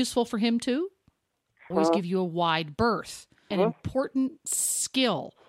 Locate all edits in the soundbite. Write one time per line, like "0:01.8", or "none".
0:01.7
0:03.5